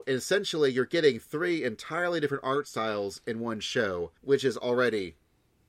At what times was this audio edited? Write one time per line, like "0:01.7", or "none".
0:04.2